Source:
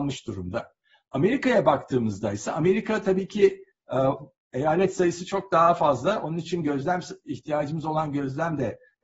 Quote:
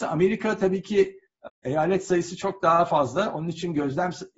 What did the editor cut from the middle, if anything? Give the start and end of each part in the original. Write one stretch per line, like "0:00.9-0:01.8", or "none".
0:03.9-0:04.4